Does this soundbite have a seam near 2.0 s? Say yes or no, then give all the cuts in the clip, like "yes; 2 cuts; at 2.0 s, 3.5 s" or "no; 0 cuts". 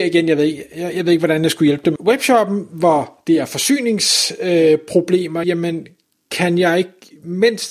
yes; 2 cuts; at 2.0 s, 5.4 s